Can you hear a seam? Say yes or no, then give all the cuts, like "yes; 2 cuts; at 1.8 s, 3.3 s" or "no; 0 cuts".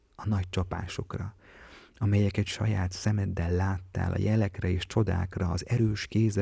no; 0 cuts